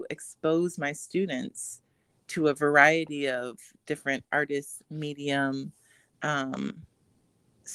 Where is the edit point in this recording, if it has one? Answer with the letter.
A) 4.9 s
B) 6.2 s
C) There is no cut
C